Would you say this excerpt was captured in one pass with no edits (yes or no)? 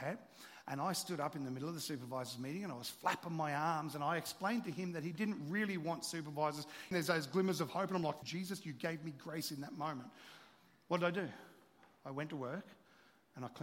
no